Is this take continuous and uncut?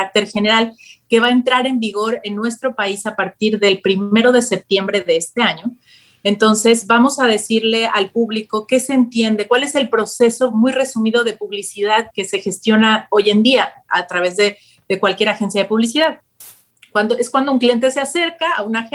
no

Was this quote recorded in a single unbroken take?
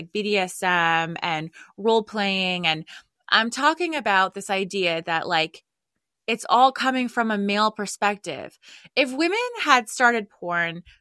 yes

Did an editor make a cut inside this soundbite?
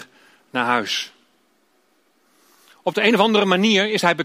no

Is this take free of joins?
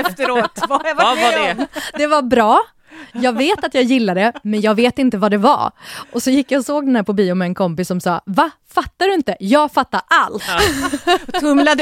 no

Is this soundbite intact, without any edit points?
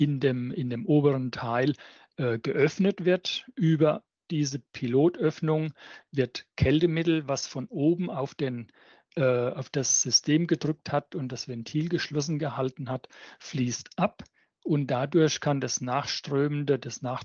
yes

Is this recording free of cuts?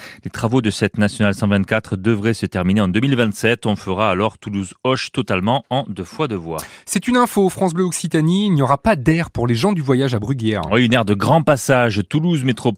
yes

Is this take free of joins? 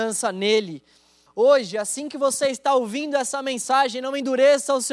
no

